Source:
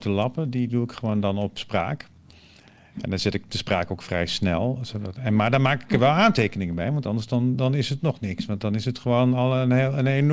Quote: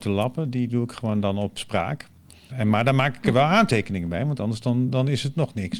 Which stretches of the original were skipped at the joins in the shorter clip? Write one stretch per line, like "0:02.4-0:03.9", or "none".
0:02.5-0:05.2